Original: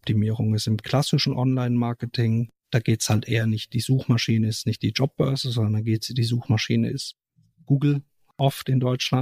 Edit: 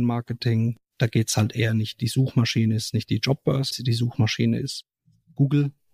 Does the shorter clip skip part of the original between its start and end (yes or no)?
yes